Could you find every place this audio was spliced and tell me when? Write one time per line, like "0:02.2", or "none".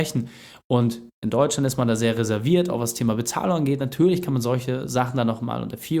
none

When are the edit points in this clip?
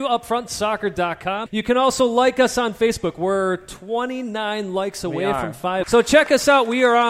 0:01.5
0:05.8

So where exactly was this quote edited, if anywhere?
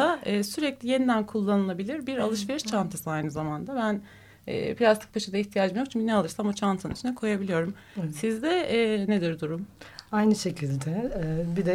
none

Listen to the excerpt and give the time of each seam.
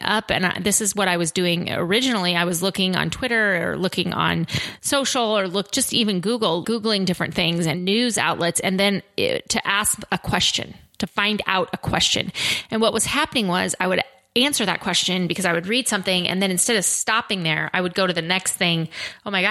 0:06.6

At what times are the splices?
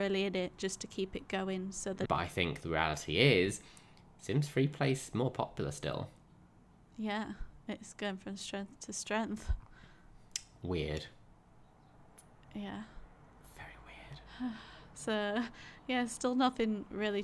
0:02.0

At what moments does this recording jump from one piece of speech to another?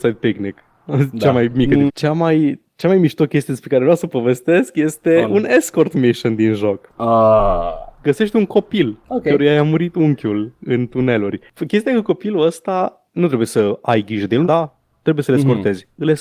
0:01.9
0:14.4

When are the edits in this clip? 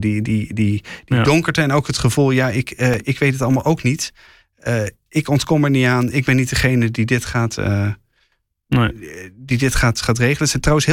none

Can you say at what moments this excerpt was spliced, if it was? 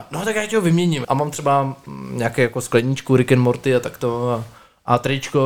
0:01.0

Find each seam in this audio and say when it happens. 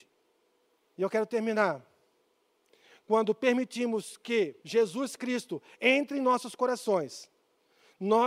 0:00.9
0:04.6

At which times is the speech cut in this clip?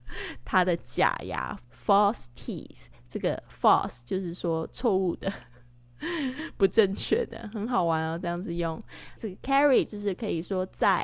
0:01.6
0:09.2

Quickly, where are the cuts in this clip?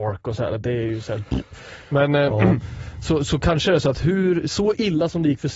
none

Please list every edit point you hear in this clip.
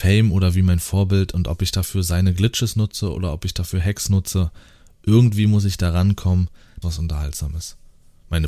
0:06.8

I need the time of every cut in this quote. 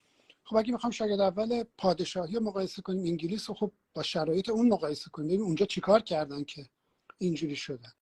0:01.7

